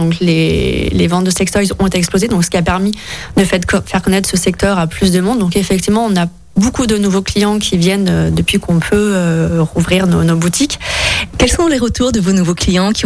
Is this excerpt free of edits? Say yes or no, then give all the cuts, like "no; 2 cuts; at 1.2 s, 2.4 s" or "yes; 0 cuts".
no; 1 cut; at 11.3 s